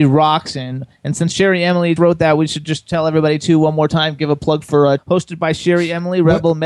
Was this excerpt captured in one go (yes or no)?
no